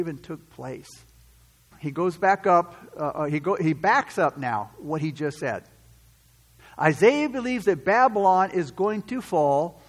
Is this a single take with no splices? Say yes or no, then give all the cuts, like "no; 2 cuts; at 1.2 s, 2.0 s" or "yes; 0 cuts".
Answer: no; 1 cut; at 1.7 s